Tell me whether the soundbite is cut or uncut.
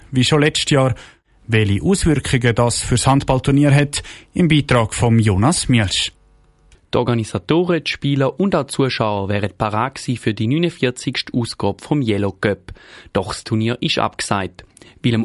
uncut